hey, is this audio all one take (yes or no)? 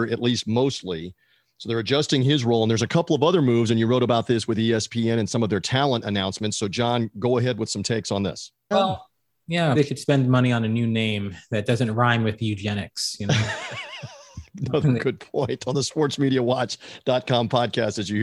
no